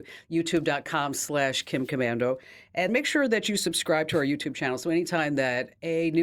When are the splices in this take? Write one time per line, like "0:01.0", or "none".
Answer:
0:02.9